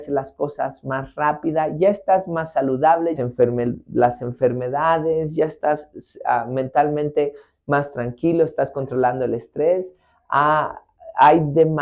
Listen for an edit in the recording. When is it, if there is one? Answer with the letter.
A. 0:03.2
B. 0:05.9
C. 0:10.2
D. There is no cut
A